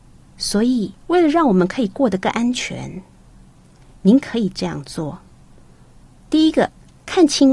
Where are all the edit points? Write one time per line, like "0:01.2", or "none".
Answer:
0:01.0